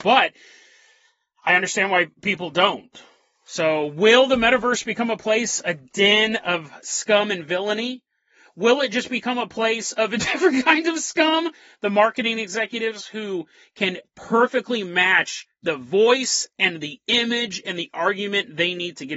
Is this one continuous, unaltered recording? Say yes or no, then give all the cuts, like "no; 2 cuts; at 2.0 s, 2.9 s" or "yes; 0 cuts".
yes; 0 cuts